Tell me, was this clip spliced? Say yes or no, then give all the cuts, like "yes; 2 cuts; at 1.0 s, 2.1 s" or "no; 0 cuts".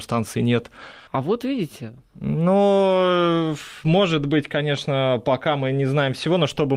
yes; 1 cut; at 1.1 s